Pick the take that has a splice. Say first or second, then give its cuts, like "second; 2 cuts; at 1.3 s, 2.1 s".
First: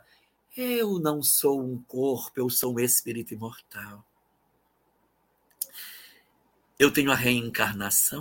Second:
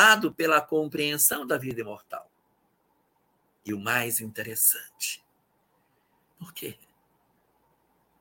second; 1 cut; at 6.3 s